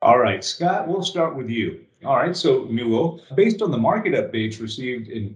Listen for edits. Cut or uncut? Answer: cut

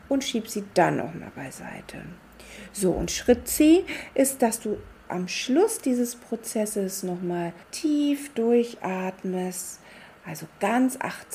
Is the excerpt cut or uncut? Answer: cut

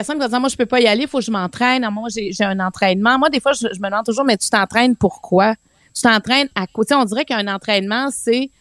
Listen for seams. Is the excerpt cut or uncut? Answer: uncut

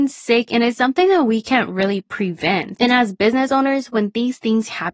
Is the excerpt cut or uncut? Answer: cut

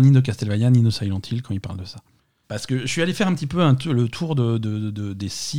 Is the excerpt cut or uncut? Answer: cut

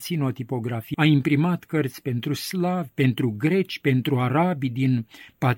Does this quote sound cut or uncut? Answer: cut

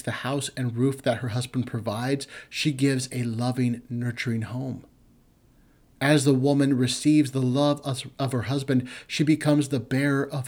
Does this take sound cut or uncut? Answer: uncut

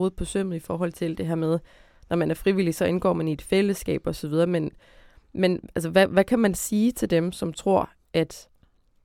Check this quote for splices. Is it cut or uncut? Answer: uncut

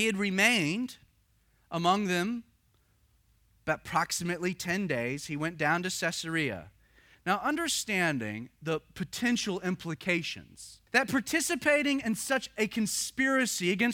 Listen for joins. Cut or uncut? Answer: cut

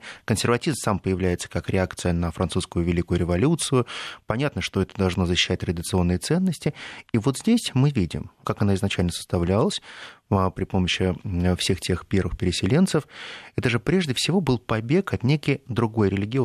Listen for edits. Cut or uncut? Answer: cut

